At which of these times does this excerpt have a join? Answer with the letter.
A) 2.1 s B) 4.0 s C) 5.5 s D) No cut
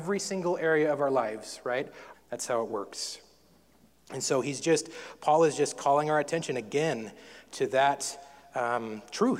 A